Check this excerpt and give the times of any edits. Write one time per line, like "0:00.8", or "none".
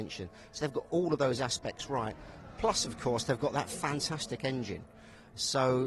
none